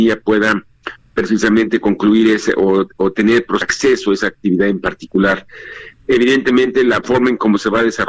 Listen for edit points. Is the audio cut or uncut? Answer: cut